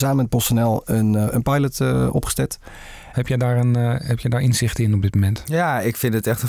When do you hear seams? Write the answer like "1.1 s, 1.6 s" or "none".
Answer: 3.1 s